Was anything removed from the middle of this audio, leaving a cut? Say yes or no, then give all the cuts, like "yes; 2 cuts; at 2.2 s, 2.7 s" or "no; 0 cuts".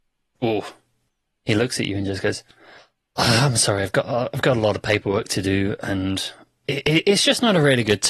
no; 0 cuts